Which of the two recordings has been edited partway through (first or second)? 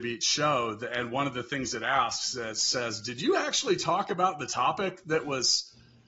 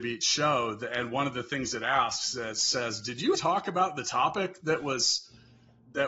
second